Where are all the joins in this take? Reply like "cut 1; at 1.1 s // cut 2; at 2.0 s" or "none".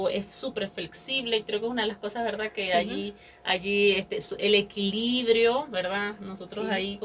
none